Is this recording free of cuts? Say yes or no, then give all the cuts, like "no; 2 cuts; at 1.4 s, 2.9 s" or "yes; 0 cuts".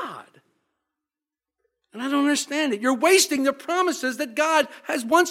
yes; 0 cuts